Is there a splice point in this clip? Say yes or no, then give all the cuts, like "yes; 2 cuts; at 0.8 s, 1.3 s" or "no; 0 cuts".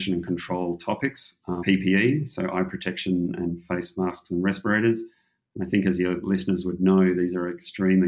yes; 1 cut; at 1.6 s